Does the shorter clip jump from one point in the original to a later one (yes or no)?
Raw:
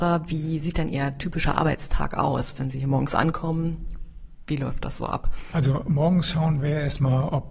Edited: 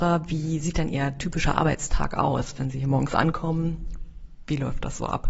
no